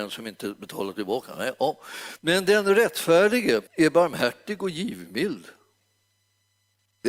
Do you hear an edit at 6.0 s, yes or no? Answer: no